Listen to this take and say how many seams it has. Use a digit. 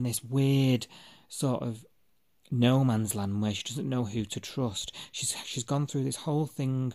0